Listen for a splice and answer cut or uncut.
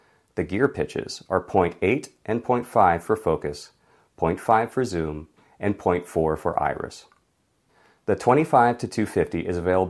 uncut